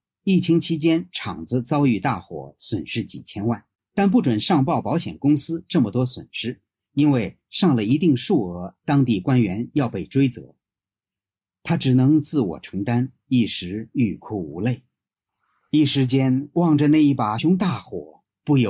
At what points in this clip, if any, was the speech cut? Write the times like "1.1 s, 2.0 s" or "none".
17.4 s